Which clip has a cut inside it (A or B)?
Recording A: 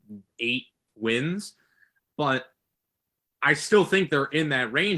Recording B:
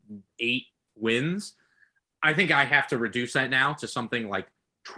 A